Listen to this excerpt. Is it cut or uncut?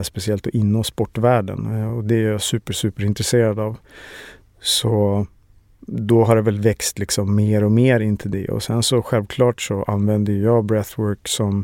uncut